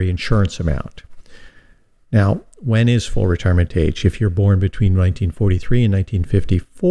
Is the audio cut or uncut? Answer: uncut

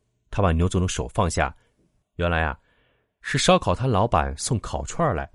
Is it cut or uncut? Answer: cut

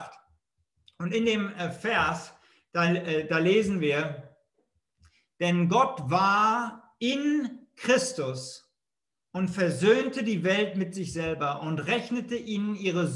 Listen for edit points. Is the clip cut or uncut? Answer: uncut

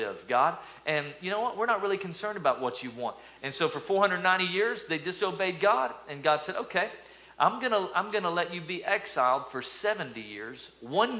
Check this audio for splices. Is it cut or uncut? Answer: uncut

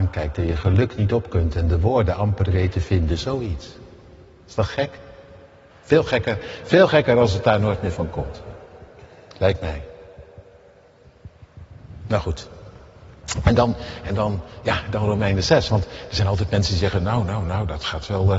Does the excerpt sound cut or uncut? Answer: cut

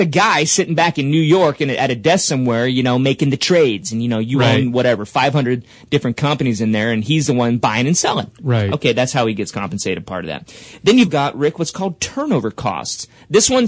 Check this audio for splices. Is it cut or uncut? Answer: cut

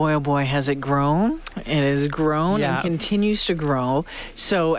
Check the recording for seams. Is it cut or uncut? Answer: uncut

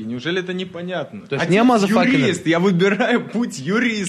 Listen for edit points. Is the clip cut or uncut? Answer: uncut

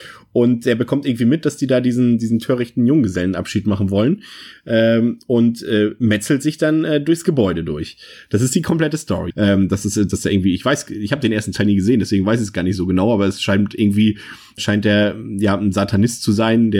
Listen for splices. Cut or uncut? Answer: cut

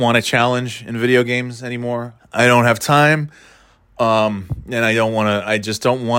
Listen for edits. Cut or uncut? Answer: cut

